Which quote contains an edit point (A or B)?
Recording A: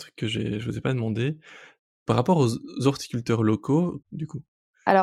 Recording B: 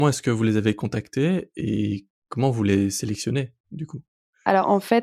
A